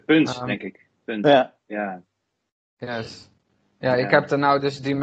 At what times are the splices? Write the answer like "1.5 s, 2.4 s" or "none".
none